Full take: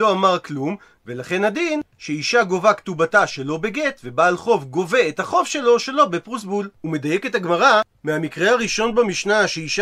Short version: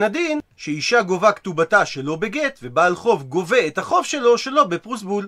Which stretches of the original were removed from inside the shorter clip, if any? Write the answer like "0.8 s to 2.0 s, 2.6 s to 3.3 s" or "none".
none